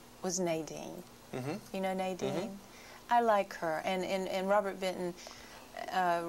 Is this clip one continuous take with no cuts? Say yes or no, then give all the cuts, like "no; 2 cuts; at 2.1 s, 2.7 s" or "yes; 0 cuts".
yes; 0 cuts